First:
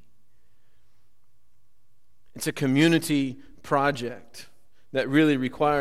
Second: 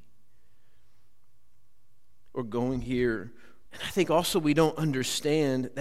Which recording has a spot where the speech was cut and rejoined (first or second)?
second